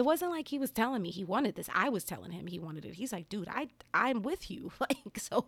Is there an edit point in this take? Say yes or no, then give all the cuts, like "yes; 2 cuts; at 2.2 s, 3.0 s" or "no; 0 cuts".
no; 0 cuts